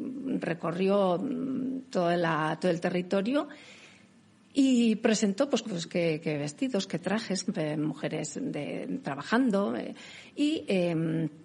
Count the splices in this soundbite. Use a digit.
2